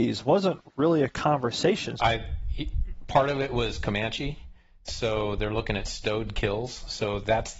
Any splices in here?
yes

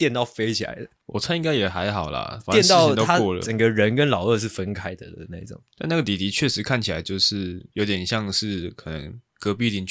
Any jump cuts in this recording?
no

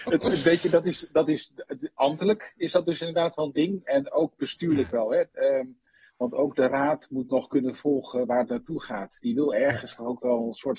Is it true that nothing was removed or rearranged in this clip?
yes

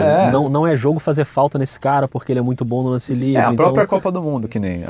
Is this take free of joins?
yes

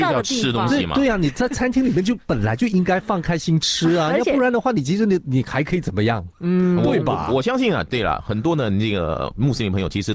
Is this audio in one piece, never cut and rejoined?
yes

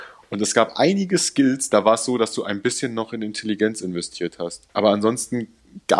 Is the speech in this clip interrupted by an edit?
no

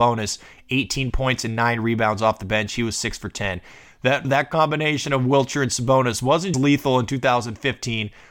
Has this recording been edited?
yes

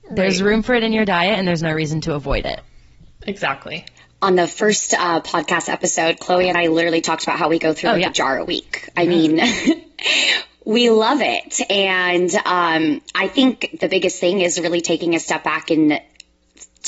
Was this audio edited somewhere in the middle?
no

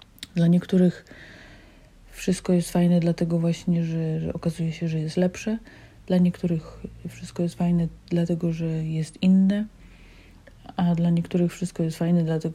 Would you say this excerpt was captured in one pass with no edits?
yes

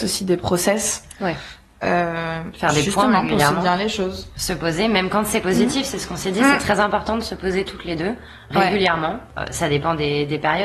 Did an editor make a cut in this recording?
no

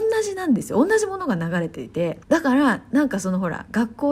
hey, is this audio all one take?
no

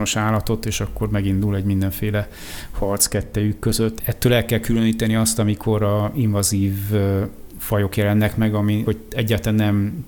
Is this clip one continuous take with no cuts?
no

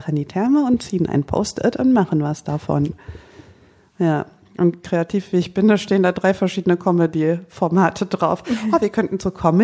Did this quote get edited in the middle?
no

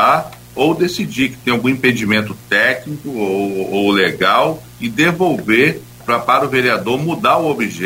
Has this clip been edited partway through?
yes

